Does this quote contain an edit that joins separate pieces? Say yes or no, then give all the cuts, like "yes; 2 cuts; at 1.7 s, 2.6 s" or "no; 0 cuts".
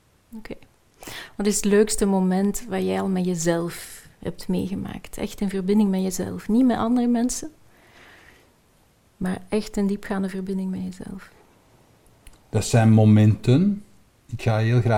no; 0 cuts